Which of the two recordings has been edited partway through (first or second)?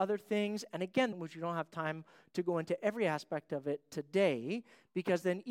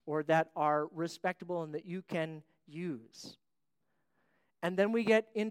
first